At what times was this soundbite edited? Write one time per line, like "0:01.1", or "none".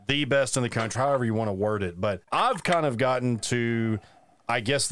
0:00.9
0:02.2

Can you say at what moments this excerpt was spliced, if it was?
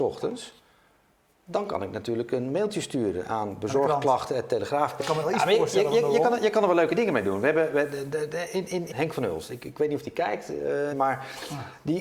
0:05.0
0:08.9
0:10.9

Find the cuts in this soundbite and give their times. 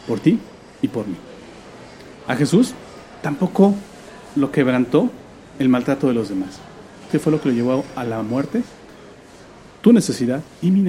0:07.1

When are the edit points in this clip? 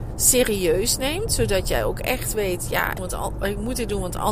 0:03.0

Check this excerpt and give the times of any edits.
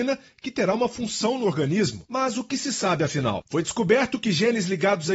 none

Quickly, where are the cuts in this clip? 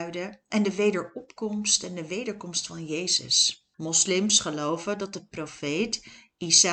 0:03.7

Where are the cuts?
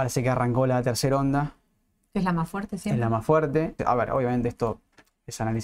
0:03.8

